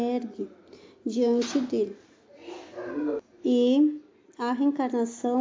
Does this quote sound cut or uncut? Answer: cut